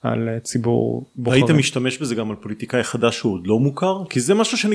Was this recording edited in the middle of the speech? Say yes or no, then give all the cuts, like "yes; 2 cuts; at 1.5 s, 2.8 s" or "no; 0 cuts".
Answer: no; 0 cuts